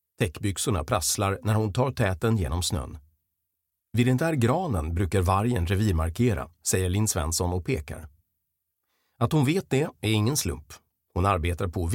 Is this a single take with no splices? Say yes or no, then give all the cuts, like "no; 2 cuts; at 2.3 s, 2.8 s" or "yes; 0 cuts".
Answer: yes; 0 cuts